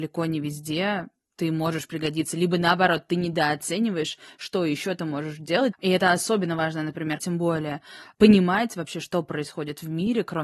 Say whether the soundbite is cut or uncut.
cut